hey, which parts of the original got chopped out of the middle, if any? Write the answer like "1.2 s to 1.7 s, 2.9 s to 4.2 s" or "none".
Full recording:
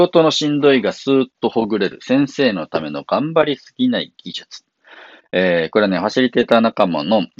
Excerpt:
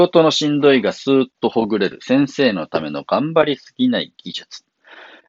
none